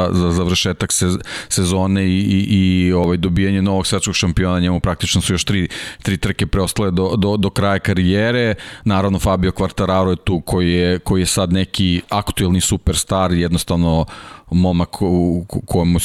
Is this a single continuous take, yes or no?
yes